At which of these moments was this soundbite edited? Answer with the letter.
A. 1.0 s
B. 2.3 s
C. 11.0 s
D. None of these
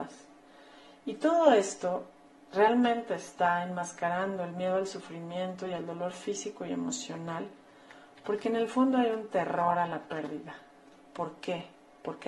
D